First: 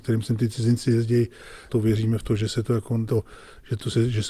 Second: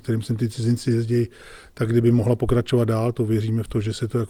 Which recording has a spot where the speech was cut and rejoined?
first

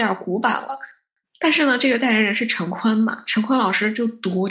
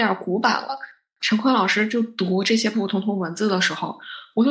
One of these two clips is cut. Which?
second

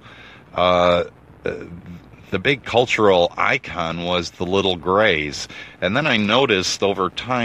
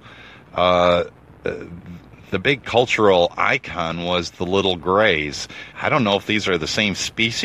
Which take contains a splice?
second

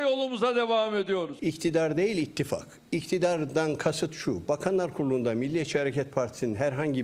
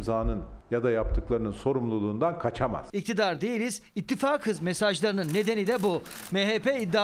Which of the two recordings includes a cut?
second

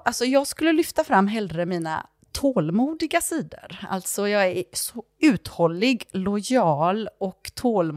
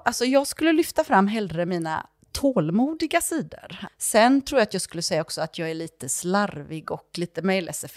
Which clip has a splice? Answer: second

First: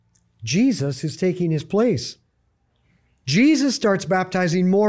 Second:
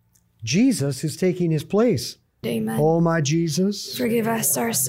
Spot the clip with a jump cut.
second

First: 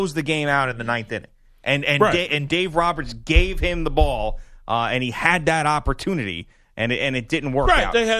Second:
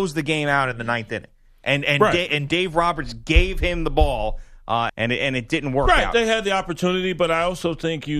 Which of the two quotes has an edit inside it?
second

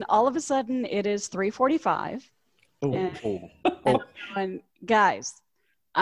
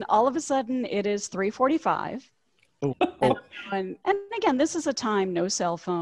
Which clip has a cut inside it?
second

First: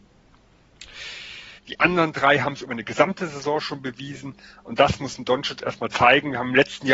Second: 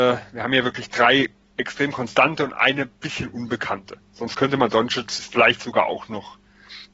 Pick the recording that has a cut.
first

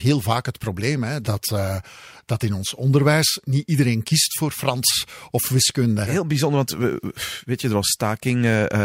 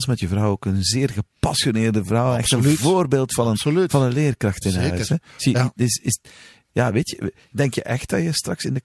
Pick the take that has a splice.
first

